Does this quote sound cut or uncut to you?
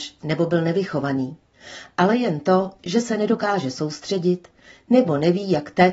uncut